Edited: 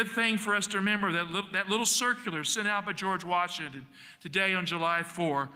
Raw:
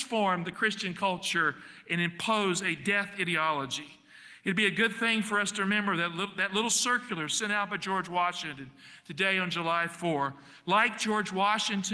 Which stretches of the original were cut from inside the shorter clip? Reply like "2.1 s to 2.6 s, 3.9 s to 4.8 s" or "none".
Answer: none